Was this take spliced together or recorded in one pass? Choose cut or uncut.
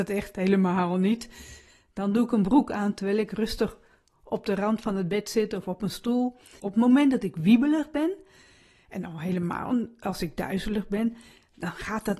cut